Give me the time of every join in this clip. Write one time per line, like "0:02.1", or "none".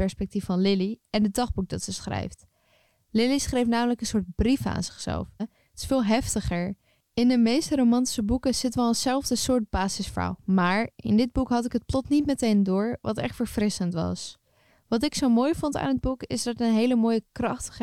0:05.4